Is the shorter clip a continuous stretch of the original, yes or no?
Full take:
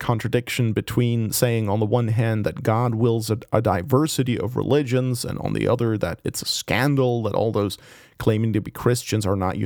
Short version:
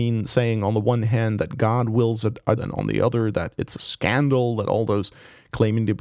no